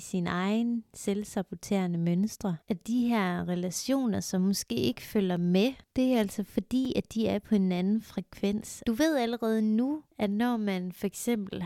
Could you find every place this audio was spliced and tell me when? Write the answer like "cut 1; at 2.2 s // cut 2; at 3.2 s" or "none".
cut 1; at 2.6 s // cut 2; at 8.8 s